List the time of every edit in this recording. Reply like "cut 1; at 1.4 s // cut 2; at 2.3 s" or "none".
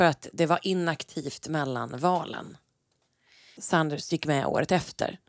cut 1; at 3.6 s